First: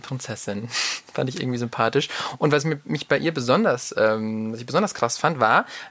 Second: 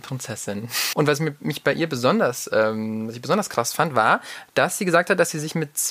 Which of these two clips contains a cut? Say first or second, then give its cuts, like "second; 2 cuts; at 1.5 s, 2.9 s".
second; 1 cut; at 0.9 s